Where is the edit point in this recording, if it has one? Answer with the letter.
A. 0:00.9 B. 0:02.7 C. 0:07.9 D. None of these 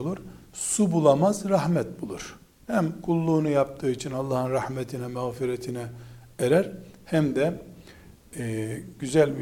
B